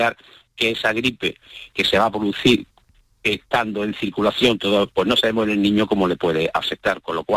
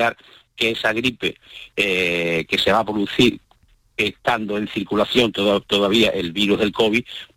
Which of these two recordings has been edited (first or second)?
first